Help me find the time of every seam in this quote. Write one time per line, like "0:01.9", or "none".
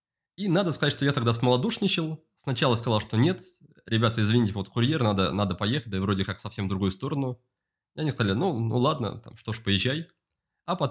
none